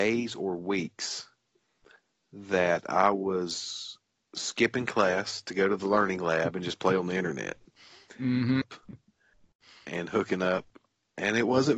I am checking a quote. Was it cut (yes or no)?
yes